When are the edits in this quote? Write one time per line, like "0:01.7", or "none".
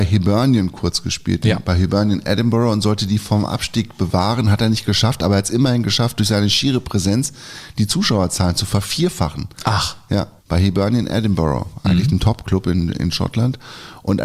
0:10.4